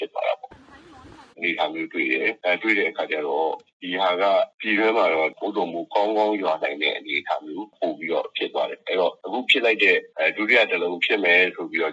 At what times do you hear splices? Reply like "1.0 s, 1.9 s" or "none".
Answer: 1.3 s